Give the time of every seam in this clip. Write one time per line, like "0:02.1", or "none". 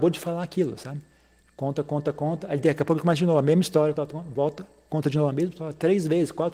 0:04.0